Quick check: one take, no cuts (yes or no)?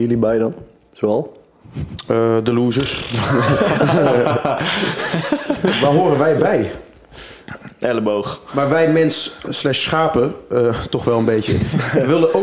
no